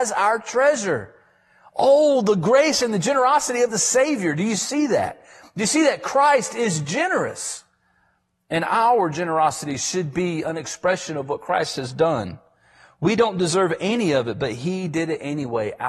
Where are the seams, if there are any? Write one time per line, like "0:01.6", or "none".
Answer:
none

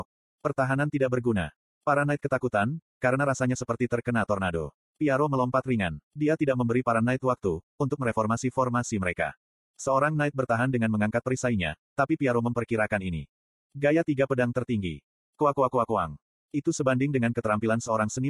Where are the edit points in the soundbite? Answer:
0:09.7

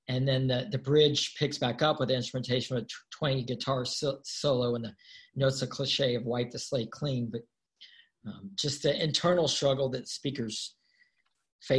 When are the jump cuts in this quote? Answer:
none

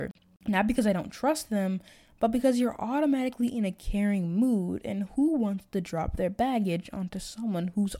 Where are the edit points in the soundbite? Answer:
none

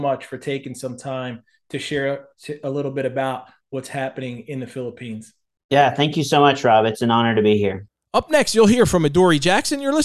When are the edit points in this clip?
none

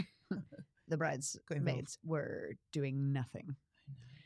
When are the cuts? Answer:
none

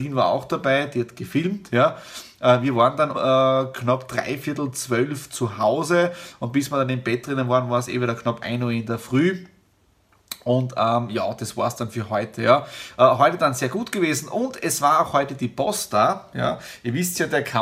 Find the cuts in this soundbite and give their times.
0:03.1

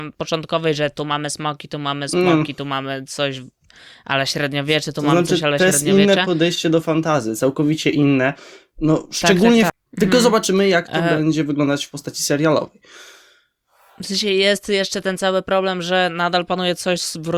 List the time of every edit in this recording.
0:09.7

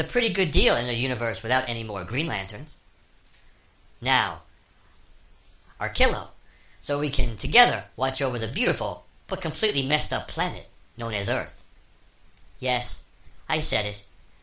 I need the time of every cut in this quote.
0:05.8

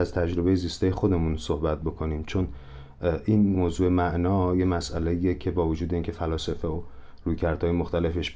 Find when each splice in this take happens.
0:03.5

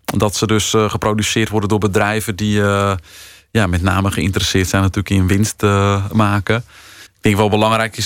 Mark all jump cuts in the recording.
0:07.1

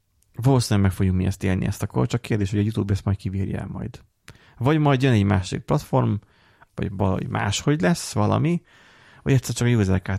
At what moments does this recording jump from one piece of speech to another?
0:06.7

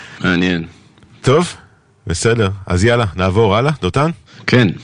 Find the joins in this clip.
none

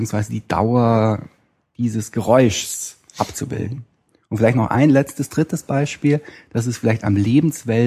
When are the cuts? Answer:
none

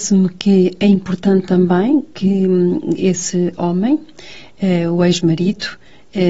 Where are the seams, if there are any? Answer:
none

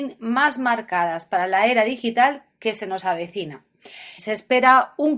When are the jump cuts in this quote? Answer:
0:04.2

